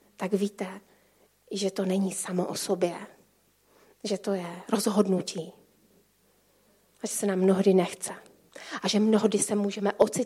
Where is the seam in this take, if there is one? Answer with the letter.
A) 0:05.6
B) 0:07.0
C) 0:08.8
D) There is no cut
D